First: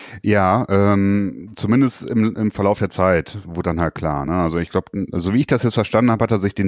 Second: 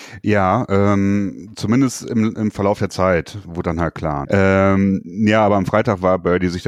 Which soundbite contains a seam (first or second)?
second